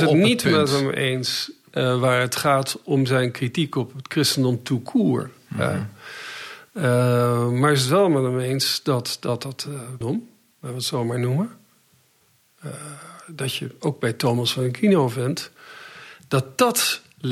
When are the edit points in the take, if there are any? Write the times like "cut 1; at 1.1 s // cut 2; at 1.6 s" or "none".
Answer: cut 1; at 10.0 s

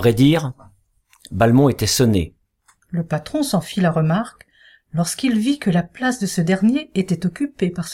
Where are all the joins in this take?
cut 1; at 2.8 s

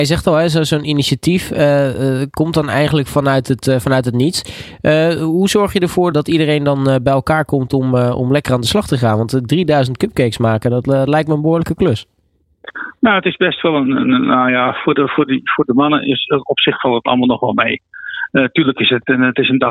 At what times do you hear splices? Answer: cut 1; at 6.1 s

